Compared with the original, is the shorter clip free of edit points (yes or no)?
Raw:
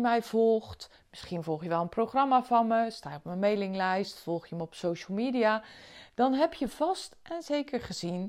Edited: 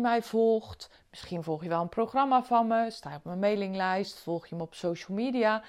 yes